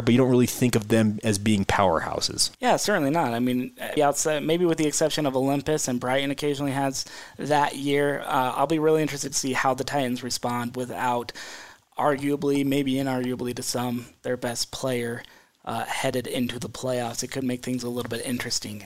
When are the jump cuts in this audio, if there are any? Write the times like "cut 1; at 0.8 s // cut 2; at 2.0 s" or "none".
cut 1; at 2.5 s // cut 2; at 4.0 s